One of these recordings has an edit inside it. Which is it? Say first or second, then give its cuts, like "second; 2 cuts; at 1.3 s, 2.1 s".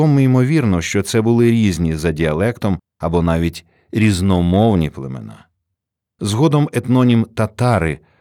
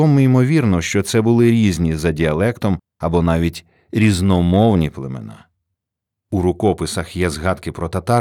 second; 1 cut; at 6.1 s